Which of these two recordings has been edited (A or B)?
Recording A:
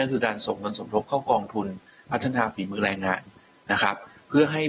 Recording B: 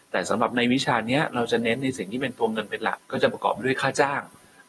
B